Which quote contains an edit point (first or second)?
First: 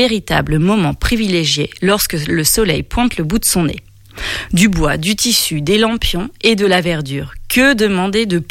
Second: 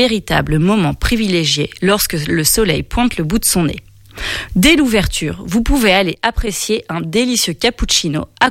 second